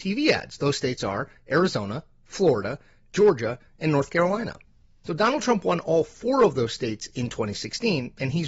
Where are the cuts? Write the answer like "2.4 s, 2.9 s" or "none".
none